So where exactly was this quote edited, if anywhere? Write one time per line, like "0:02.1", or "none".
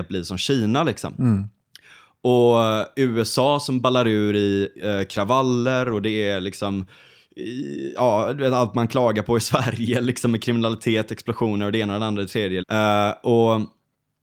0:12.6